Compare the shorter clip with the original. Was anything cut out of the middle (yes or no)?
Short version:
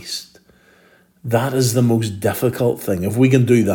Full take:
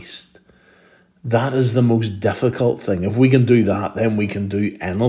no